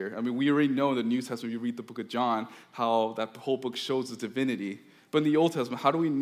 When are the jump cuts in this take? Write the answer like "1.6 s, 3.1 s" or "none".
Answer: none